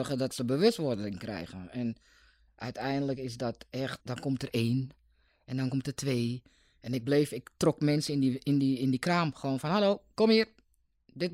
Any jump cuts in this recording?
yes; 1 cut; at 4.0 s

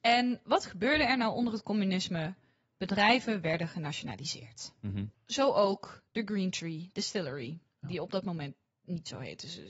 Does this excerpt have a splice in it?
no; 0 cuts

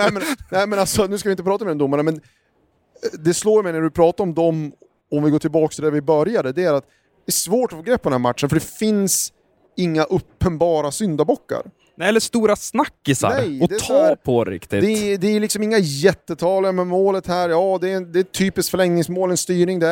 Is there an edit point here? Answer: no; 0 cuts

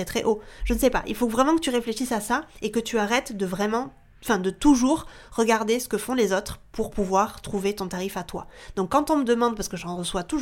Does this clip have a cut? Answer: no; 0 cuts

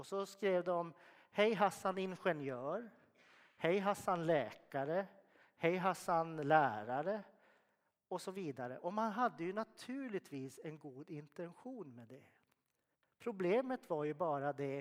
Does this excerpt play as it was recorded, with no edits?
yes; 0 cuts

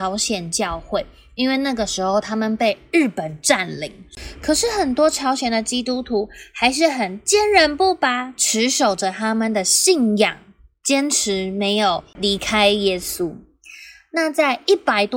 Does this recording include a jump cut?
no; 0 cuts

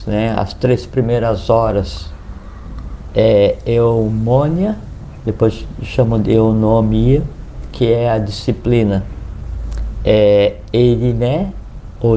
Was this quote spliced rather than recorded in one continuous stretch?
no; 0 cuts

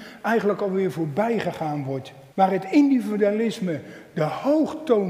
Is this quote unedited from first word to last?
no; 1 cut; at 2.3 s

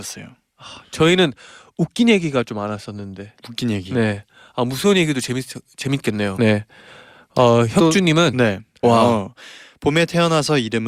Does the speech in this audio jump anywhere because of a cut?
yes; 2 cuts; at 6.4 s, 8.8 s

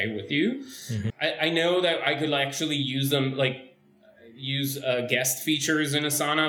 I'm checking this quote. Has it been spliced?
yes; 1 cut; at 1.1 s

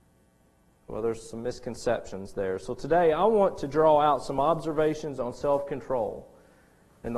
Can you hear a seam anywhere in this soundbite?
no; 0 cuts

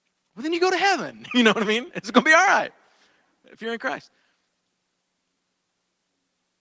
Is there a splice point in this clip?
no; 0 cuts

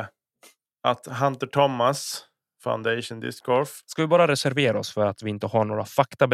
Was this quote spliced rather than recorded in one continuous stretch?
no; 0 cuts

